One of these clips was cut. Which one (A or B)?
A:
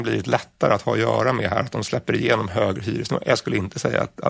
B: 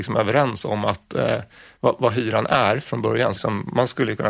B